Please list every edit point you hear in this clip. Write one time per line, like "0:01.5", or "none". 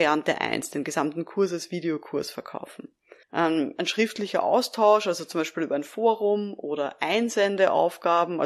0:03.2